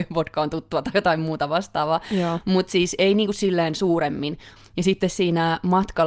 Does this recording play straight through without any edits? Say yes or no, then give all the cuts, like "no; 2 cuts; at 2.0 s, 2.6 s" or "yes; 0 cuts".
no; 1 cut; at 4.6 s